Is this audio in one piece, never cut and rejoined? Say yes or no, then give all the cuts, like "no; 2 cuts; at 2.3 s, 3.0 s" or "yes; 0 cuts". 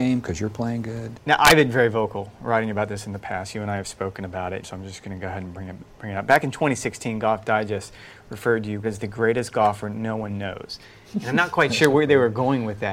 no; 3 cuts; at 1.1 s, 4.6 s, 8.8 s